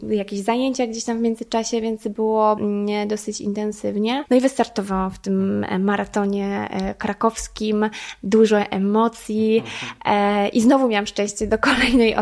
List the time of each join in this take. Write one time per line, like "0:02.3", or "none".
0:02.6
0:04.3